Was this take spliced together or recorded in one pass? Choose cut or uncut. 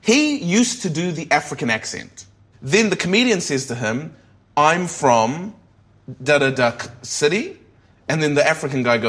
cut